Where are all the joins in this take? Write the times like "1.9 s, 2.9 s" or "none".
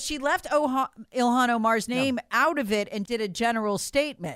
3.0 s